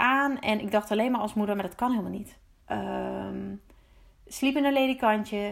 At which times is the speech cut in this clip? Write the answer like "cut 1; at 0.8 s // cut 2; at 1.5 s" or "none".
cut 1; at 2.6 s